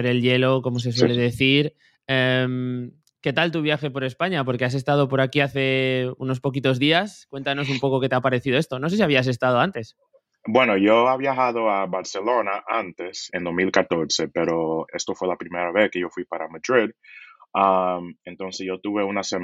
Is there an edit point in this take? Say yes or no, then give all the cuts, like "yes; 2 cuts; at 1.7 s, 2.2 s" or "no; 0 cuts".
yes; 2 cuts; at 13.3 s, 14.9 s